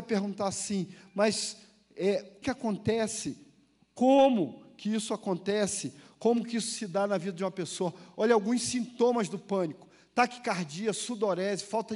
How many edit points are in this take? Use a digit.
1